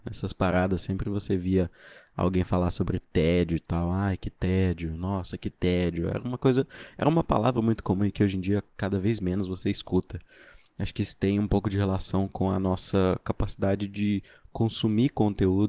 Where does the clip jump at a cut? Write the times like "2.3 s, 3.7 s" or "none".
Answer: none